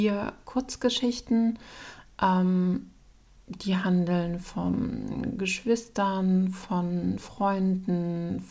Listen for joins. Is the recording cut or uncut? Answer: uncut